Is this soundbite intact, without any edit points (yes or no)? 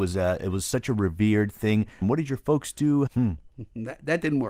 no